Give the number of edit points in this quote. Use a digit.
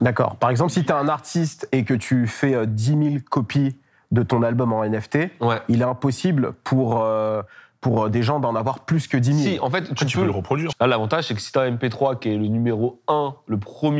1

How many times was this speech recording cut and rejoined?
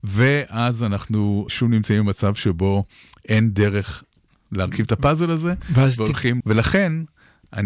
2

